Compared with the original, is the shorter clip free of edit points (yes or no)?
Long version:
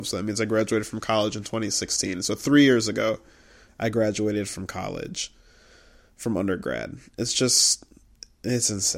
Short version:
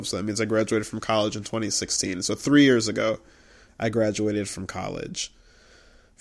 yes